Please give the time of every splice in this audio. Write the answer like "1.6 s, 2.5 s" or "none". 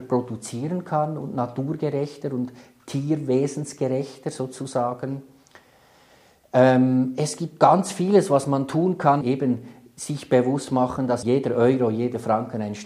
9.2 s